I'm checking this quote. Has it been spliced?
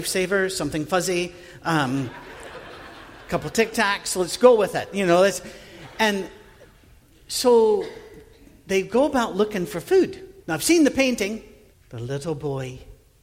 yes; 2 cuts; at 10.4 s, 11.7 s

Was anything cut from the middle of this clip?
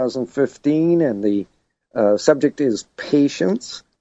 no; 0 cuts

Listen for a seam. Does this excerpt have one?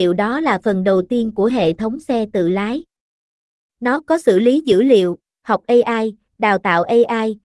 no; 0 cuts

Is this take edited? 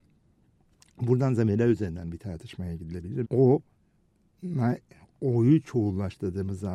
yes; 1 cut; at 3.2 s

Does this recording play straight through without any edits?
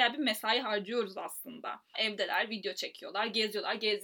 no; 1 cut; at 1.9 s

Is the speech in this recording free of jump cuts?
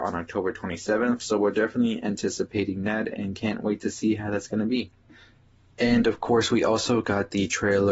yes; 0 cuts

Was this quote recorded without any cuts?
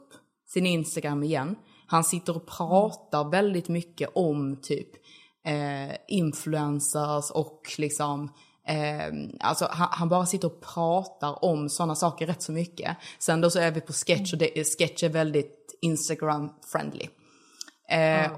yes; 0 cuts

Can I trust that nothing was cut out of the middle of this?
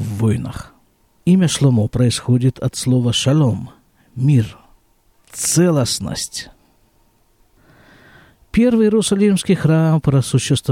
no; 1 cut; at 1.1 s

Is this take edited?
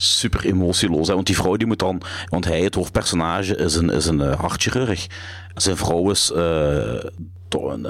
no; 0 cuts

